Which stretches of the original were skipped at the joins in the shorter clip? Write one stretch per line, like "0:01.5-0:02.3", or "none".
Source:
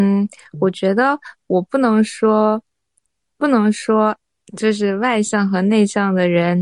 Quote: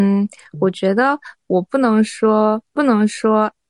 0:02.7-0:03.3